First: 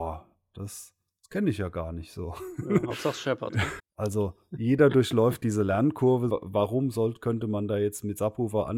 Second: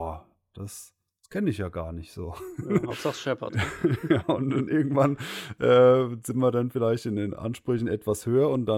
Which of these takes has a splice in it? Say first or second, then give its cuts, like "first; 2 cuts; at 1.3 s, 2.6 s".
first; 2 cuts; at 3.8 s, 6.3 s